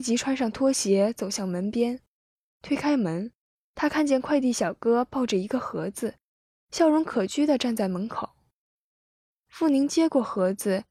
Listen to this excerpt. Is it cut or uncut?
uncut